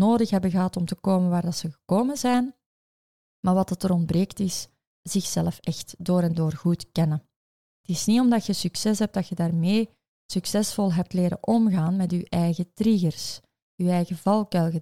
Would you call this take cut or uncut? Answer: uncut